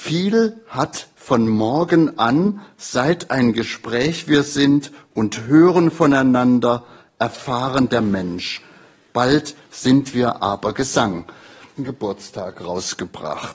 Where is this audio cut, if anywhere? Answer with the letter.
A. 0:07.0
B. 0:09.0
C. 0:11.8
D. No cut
C